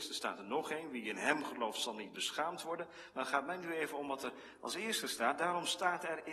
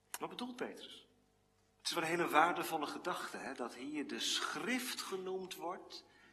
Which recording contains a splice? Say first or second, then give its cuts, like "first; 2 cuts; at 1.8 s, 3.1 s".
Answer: second; 1 cut; at 1.7 s